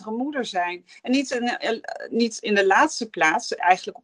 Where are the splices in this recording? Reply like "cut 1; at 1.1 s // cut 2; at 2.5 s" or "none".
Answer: none

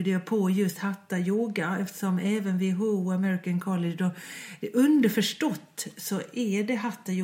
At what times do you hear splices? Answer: none

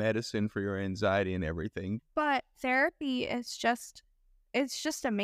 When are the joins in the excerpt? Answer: cut 1; at 2.0 s

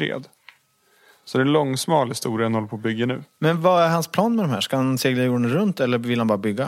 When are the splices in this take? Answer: none

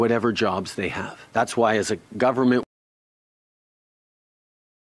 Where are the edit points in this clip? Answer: cut 1; at 1.3 s

